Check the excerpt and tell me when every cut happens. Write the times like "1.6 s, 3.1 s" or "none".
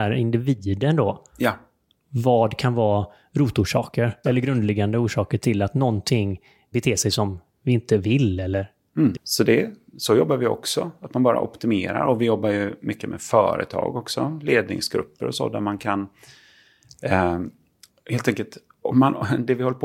4.2 s, 6.7 s, 9.1 s